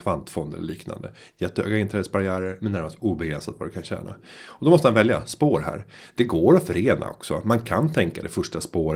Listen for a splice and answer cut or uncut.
uncut